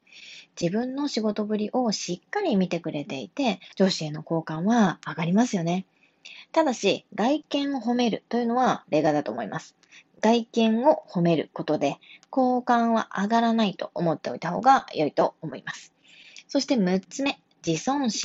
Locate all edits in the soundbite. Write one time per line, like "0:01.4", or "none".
0:03.7